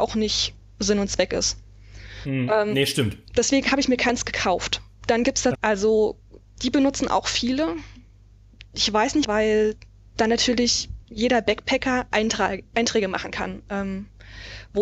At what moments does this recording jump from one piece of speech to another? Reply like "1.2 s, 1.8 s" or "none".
5.5 s, 9.2 s